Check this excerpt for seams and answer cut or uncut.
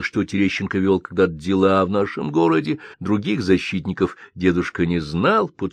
cut